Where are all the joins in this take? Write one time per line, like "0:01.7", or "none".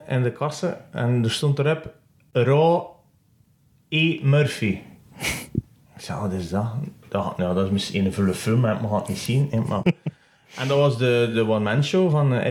none